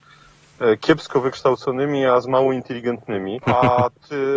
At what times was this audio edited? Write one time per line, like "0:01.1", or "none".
0:03.4